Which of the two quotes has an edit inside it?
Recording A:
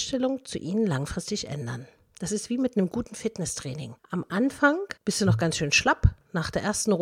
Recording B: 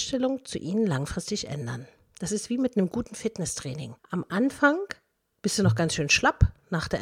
A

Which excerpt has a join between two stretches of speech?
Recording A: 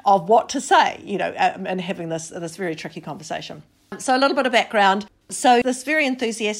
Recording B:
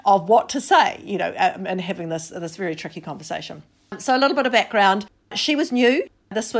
A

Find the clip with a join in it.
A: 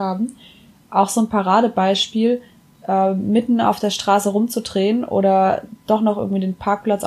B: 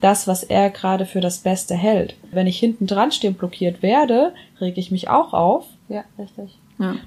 B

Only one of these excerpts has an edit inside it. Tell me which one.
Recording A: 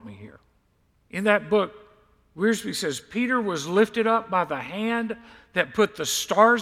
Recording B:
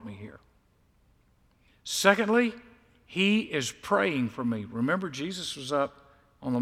A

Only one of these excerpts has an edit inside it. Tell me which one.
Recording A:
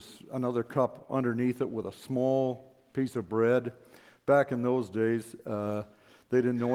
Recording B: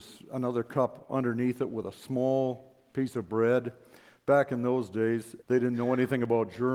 B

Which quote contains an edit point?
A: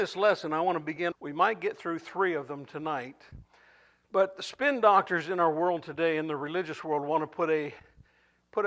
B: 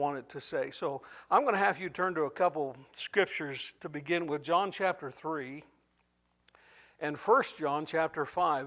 A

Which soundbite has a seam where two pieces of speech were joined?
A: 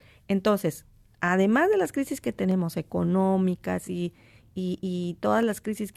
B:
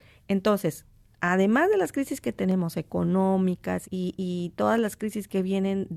B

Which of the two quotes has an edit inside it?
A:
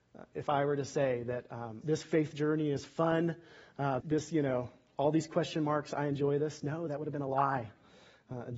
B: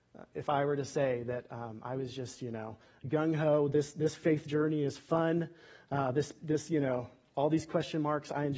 A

